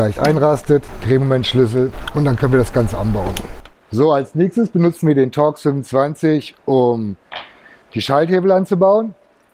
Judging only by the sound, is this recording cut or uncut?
uncut